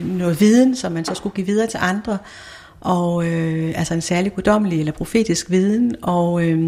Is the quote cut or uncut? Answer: uncut